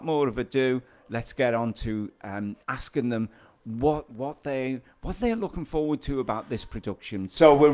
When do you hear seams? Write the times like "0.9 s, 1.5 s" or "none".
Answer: 2.6 s